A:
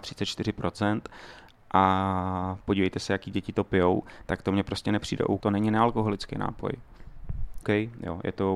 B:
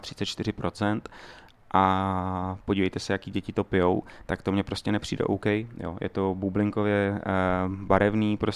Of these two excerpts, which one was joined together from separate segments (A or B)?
A